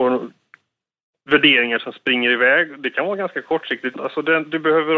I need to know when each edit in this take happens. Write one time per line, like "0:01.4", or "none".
0:03.9